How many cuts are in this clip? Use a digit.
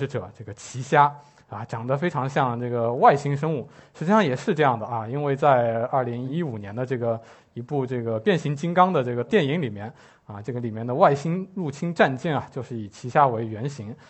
0